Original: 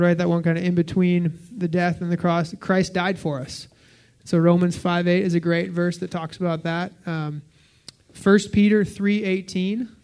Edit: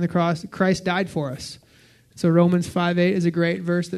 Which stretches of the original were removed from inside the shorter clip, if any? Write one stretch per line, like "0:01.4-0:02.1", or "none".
none